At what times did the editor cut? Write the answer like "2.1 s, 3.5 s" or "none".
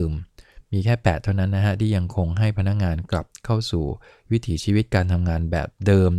none